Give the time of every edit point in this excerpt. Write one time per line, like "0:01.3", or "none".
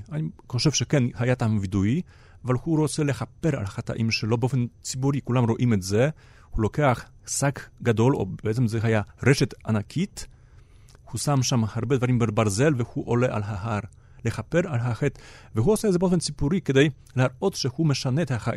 none